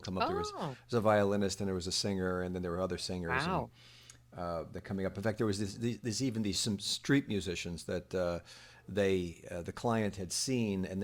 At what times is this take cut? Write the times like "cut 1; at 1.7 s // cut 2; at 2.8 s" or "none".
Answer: none